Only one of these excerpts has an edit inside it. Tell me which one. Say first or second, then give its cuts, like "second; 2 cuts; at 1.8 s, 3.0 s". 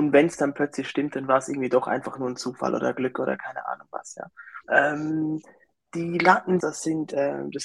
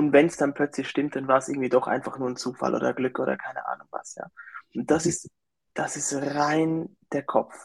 first; 2 cuts; at 4.6 s, 6.6 s